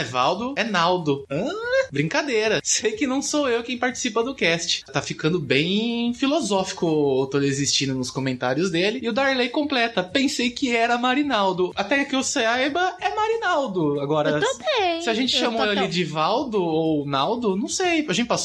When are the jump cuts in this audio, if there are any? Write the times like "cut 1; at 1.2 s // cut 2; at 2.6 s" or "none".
cut 1; at 4.9 s